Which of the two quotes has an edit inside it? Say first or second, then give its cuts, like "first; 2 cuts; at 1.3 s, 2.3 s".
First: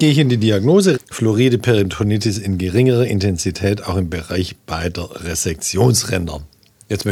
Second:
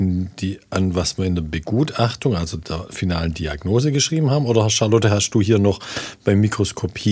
first; 1 cut; at 0.9 s